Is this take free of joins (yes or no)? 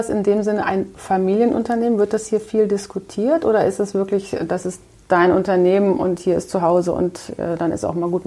yes